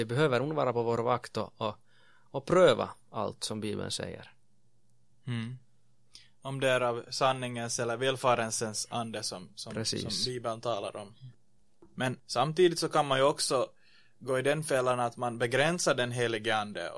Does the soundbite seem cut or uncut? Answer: uncut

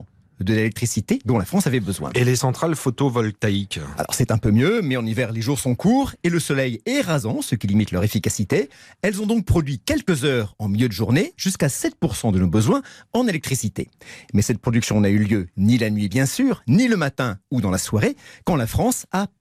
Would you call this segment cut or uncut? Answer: uncut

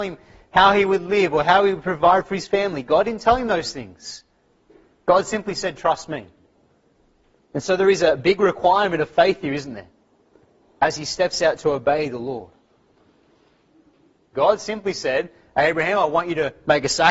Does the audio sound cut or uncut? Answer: cut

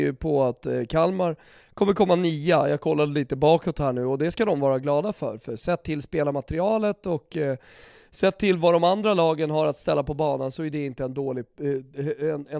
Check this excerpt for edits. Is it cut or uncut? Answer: uncut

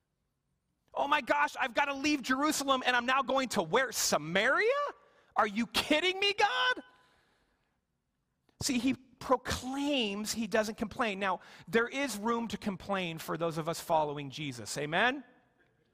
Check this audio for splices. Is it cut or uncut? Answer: uncut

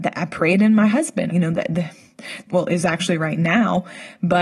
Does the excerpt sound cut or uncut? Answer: cut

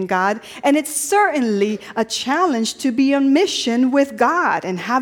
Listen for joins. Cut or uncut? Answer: uncut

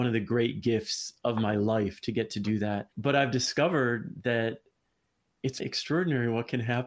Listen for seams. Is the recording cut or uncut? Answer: cut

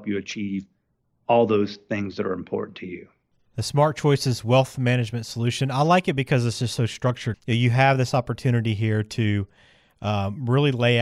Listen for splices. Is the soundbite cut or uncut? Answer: uncut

